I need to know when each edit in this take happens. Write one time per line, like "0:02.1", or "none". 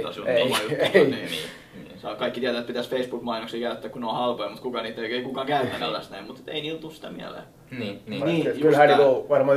0:05.8
0:08.2